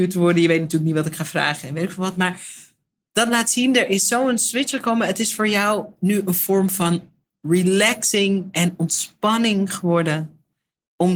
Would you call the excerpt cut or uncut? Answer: uncut